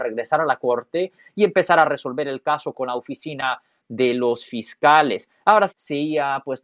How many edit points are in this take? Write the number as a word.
one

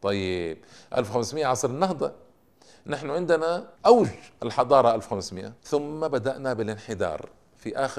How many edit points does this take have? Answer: two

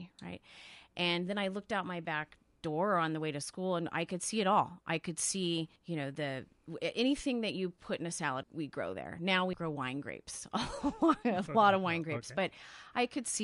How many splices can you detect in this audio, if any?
three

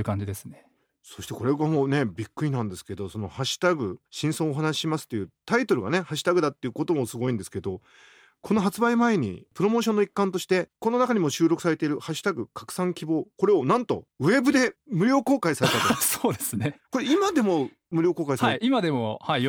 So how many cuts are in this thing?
one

